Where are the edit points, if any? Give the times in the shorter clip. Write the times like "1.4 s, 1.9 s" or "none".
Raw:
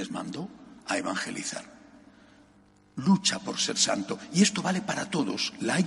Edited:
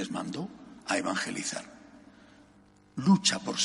none